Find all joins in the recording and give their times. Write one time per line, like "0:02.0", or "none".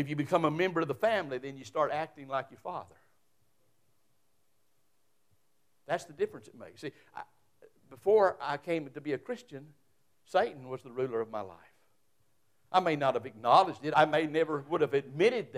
0:13.9